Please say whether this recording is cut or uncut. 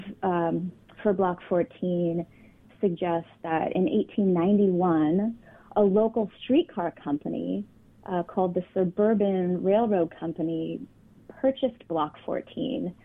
uncut